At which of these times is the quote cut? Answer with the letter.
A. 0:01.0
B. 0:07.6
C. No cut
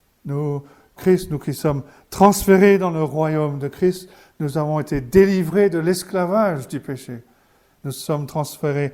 A